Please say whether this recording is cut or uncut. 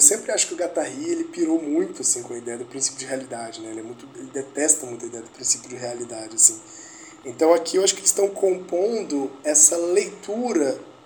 uncut